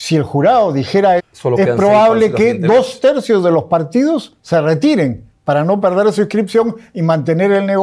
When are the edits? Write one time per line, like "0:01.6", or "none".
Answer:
0:01.2